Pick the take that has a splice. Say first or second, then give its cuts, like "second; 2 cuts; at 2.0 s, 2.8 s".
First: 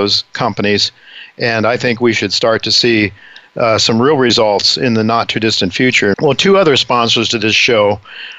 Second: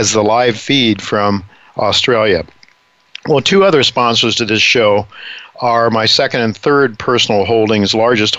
first; 1 cut; at 6.1 s